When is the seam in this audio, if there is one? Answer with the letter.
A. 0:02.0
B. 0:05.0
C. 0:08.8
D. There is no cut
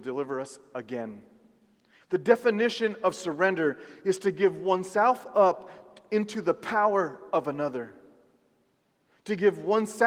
A